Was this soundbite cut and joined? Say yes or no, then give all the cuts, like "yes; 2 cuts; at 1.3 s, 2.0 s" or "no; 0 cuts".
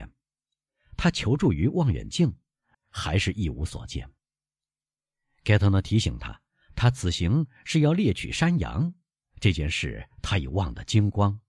yes; 1 cut; at 2.7 s